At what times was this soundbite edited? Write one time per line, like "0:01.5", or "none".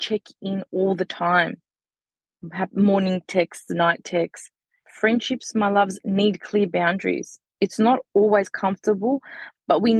0:04.8